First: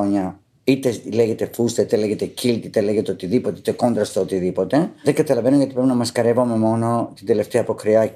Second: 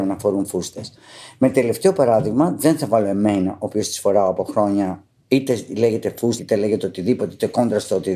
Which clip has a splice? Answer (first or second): second